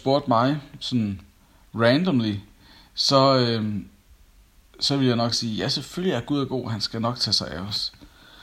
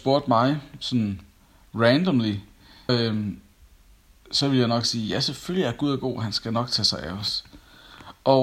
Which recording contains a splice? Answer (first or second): second